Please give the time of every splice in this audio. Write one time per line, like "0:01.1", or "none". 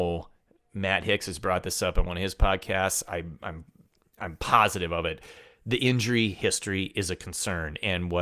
none